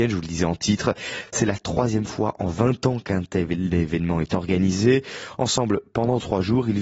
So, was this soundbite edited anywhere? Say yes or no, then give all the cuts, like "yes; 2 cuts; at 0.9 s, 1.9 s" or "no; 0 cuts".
no; 0 cuts